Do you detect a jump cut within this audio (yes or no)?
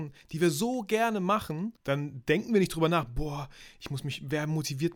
yes